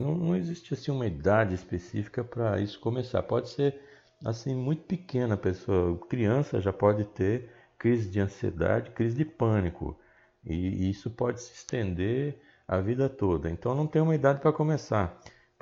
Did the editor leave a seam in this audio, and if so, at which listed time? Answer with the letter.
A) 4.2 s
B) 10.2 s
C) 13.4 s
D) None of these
D